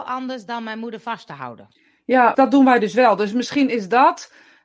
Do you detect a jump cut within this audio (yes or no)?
yes